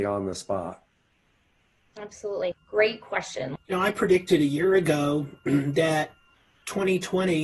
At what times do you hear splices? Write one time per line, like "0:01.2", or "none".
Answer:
0:02.5
0:03.6